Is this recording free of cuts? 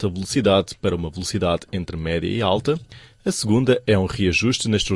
yes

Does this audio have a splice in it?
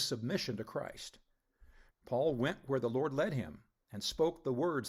yes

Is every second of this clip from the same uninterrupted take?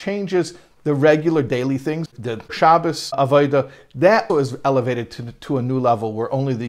no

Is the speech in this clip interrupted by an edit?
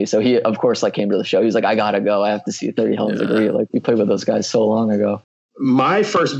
no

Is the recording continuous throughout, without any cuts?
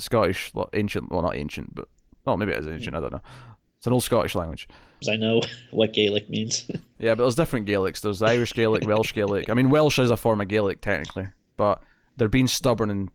no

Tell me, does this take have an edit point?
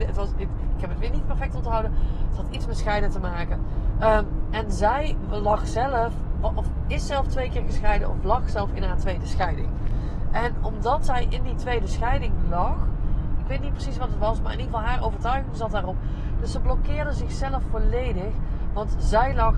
yes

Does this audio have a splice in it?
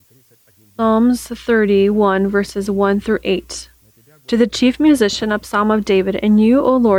no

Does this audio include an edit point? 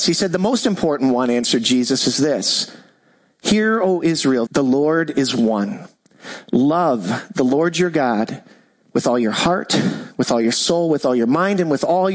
yes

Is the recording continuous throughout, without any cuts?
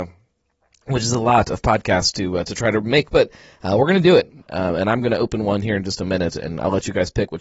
no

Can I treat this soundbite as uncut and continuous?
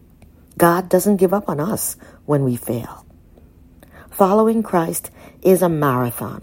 yes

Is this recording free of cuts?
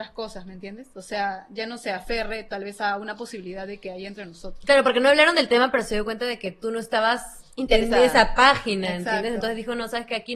yes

